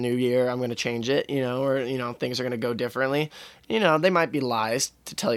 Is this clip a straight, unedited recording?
yes; 0 cuts

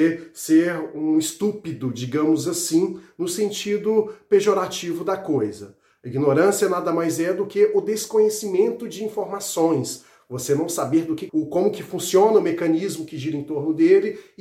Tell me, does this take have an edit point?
yes; 1 cut; at 11.3 s

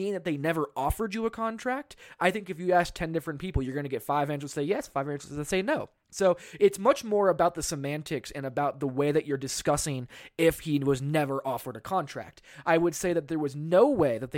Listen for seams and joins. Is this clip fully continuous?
yes; 0 cuts

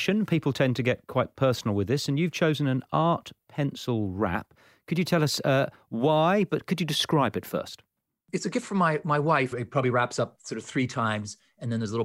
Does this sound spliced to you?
yes; 1 cut; at 9.5 s

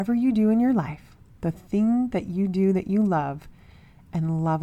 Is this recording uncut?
yes; 0 cuts

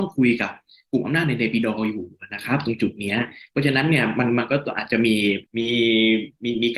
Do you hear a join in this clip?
yes; 1 cut; at 5.5 s

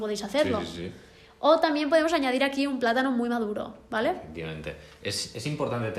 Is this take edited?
no; 0 cuts

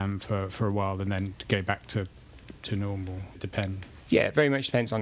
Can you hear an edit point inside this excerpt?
yes; 1 cut; at 3.4 s

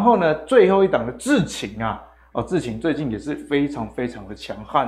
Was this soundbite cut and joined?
no; 0 cuts

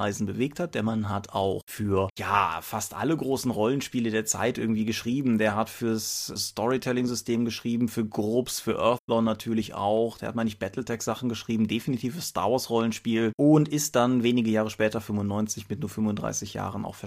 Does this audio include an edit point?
no; 0 cuts

